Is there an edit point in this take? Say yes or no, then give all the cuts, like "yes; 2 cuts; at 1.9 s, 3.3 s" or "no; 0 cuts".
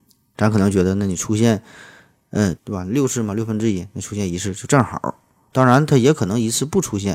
yes; 1 cut; at 2.6 s